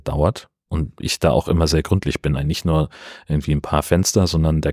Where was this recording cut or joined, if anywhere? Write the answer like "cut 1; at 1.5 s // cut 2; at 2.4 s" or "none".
cut 1; at 2.4 s